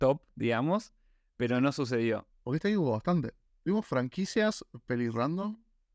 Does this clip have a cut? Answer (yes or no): yes